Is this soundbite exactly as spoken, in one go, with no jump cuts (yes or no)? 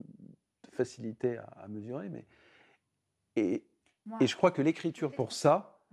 yes